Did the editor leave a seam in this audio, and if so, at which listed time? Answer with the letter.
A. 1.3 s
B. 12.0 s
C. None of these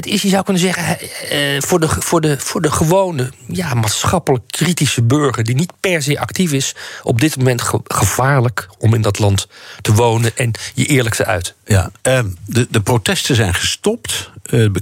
B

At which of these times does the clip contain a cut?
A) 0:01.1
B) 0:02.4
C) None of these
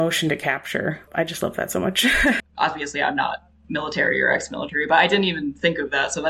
B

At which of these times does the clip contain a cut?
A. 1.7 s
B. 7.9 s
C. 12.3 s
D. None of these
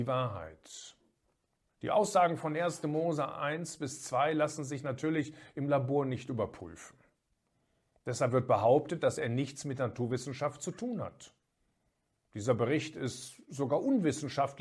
A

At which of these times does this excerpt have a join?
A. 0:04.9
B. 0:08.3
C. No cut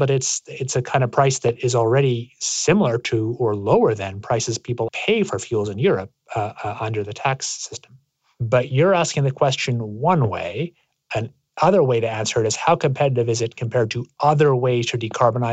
A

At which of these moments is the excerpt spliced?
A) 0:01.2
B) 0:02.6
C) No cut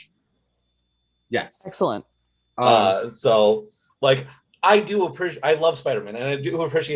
C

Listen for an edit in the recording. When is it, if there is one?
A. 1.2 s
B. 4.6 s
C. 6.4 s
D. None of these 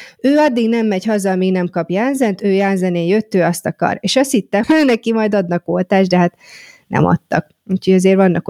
B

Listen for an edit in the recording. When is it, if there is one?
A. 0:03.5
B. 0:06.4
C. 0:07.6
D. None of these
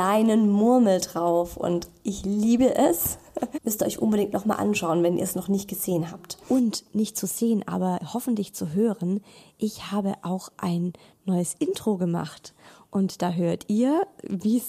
A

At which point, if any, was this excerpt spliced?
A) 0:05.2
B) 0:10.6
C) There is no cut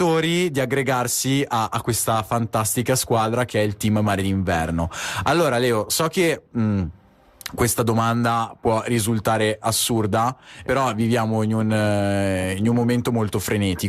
B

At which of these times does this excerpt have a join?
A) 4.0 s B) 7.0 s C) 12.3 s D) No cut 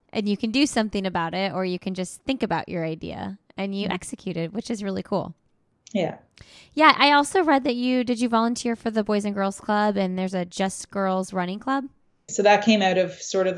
C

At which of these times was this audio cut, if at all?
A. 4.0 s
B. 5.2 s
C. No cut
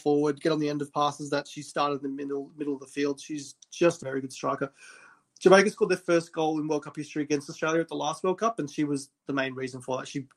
A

